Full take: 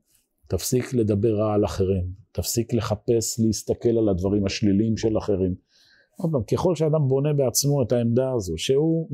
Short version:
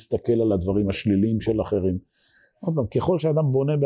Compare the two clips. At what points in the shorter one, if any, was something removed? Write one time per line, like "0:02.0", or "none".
none